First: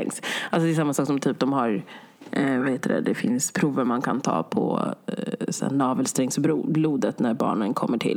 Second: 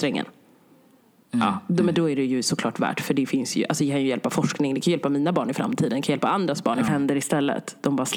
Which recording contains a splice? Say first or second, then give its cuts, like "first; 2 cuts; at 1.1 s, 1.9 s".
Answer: second; 1 cut; at 6.9 s